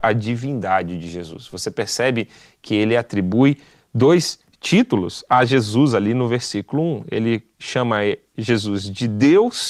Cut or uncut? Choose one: uncut